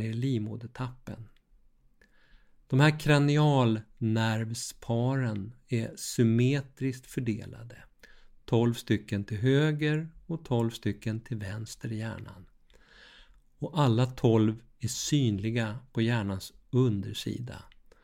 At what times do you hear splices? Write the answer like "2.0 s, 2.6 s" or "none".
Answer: none